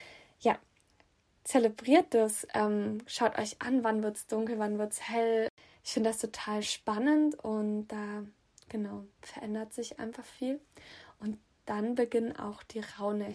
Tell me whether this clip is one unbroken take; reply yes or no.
yes